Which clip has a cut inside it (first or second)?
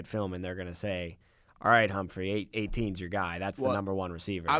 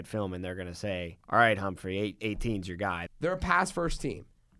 second